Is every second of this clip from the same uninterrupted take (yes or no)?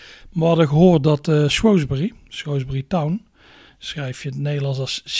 yes